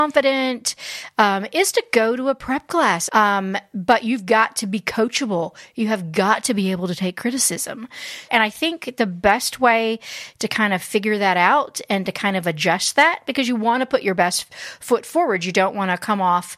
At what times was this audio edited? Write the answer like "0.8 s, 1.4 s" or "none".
3.1 s, 8.3 s